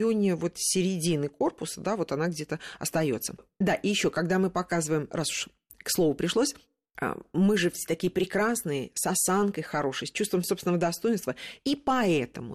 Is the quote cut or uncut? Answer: cut